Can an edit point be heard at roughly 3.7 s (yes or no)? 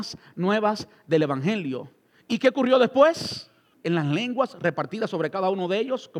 yes